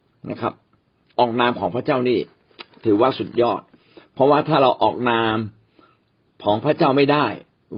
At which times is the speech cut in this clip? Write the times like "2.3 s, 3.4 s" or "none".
1.2 s